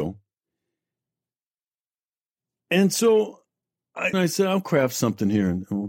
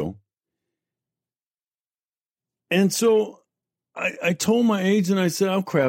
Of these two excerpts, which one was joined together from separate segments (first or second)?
first